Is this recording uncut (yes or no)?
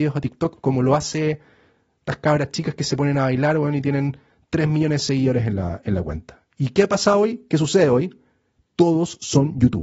yes